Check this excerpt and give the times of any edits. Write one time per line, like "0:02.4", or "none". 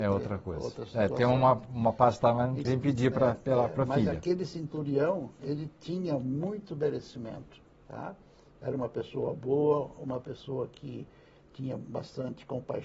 0:02.6